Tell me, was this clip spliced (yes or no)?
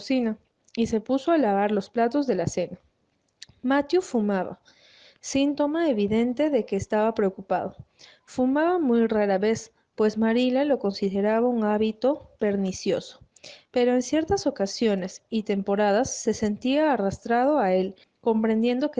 yes